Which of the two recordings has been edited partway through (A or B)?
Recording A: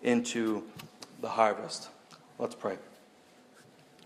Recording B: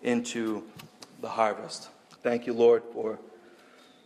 B